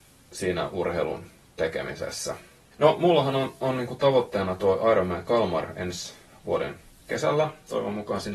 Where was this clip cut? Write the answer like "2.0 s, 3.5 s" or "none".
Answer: 2.7 s